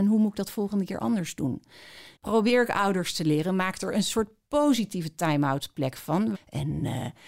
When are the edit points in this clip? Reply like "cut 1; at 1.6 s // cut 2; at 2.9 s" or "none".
cut 1; at 2.2 s // cut 2; at 6.3 s